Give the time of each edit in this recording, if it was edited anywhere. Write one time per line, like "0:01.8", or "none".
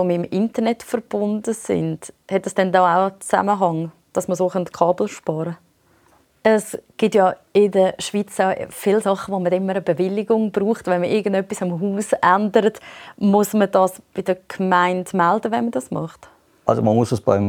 0:06.2